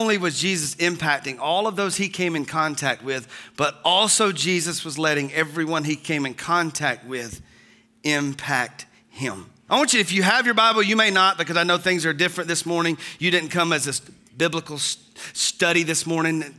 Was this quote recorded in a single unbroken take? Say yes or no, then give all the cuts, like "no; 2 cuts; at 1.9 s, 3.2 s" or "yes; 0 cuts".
no; 1 cut; at 9.7 s